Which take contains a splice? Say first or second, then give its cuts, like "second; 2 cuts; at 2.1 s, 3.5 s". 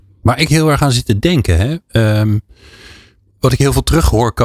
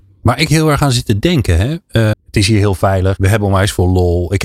second; 2 cuts; at 2.1 s, 3.2 s